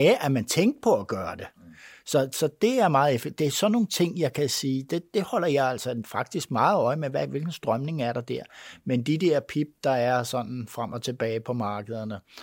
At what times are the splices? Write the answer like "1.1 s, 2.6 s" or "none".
none